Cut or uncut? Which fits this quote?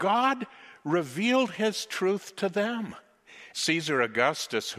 cut